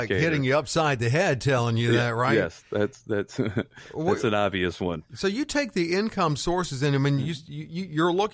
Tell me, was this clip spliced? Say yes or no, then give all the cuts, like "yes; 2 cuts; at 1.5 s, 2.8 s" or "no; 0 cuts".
no; 0 cuts